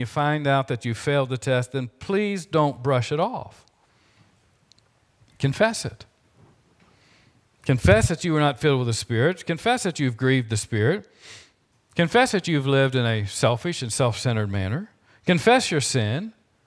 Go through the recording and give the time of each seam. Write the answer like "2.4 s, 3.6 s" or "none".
none